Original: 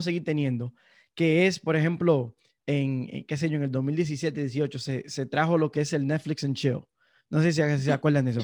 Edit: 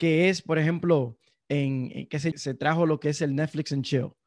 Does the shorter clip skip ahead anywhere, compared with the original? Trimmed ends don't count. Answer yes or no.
yes